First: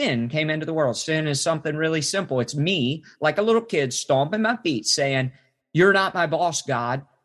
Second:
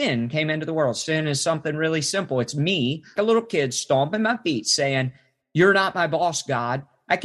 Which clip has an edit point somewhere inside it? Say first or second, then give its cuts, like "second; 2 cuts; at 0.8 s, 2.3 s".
second; 1 cut; at 3.2 s